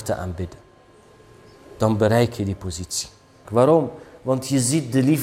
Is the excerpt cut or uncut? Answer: cut